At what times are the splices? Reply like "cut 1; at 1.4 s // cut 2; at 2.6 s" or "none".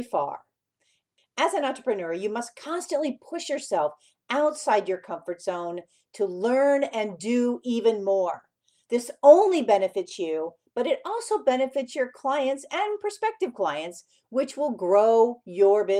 none